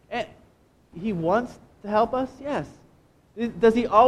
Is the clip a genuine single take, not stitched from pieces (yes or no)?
no